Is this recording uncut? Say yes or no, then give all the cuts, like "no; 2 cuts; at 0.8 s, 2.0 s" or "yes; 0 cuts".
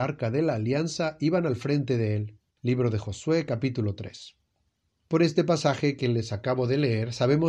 no; 1 cut; at 2.6 s